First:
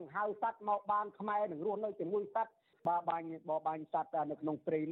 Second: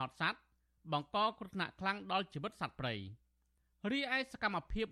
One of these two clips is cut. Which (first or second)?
first